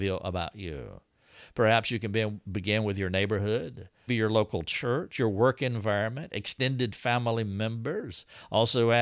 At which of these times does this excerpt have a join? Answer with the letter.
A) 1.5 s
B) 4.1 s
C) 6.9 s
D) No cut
B